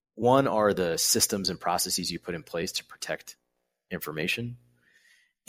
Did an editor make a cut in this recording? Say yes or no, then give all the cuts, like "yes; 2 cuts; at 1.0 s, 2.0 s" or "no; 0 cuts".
no; 0 cuts